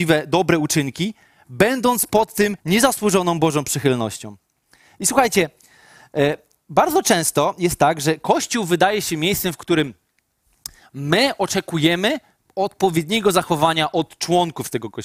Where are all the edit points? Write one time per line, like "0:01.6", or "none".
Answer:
0:02.6